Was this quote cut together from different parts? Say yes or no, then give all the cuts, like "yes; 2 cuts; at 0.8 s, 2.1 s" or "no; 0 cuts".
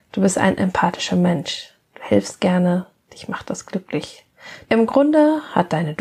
yes; 1 cut; at 4.6 s